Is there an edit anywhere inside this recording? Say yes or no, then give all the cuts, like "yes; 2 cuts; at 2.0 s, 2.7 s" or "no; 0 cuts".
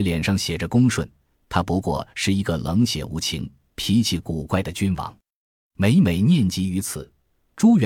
yes; 1 cut; at 1.3 s